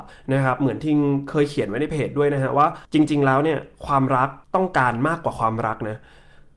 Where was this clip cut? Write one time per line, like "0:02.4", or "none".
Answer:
0:02.8
0:04.4

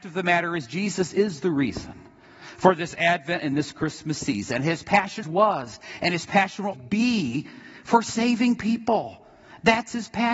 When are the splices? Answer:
0:05.2
0:06.7

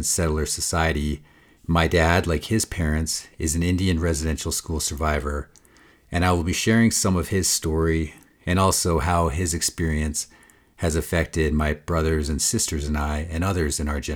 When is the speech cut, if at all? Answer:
0:01.6

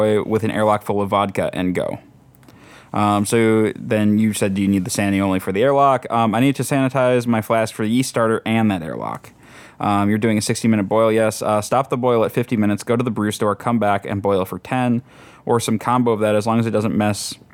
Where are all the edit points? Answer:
none

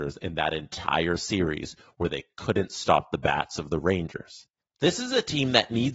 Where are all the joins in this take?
none

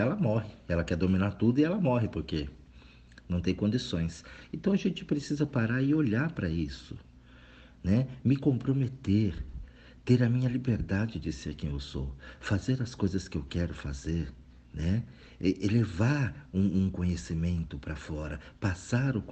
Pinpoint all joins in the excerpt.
0:14.6

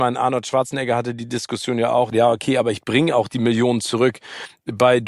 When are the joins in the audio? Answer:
0:02.1

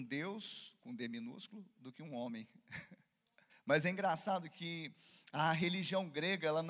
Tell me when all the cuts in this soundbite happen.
0:03.5

